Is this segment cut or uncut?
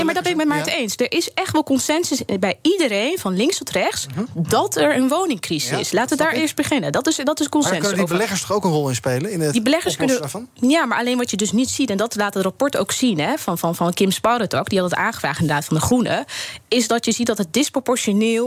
uncut